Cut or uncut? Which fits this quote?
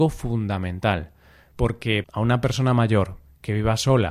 cut